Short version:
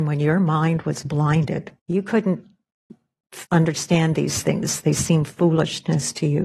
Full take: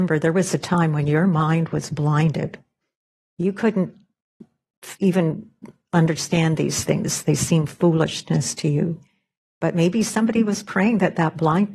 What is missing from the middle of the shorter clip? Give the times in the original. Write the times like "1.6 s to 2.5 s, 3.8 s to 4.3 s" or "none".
2.7 s to 3.3 s, 4.9 s to 5.9 s